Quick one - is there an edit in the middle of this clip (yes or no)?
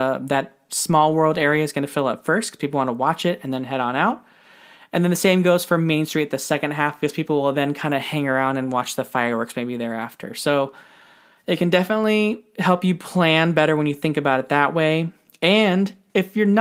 no